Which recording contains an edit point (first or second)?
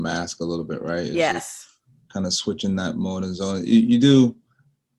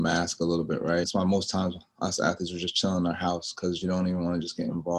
second